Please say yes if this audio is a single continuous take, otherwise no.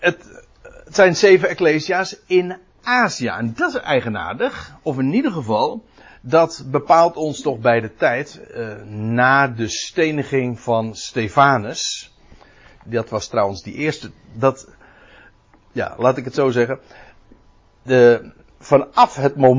yes